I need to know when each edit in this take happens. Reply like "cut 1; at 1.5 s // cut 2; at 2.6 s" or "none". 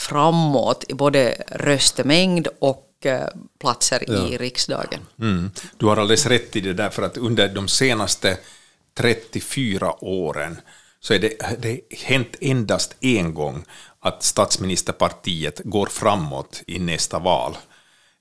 cut 1; at 16.7 s